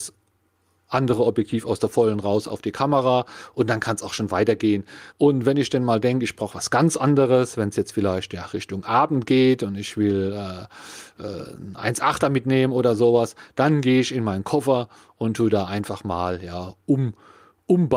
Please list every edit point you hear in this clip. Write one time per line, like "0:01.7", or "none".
0:05.1